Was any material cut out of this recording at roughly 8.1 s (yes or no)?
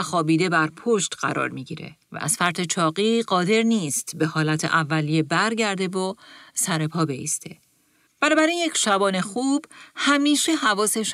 yes